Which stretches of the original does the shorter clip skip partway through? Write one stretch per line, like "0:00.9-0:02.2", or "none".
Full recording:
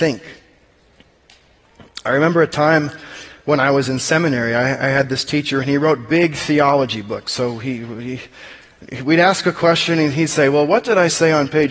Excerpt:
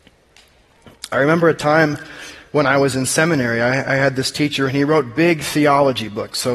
none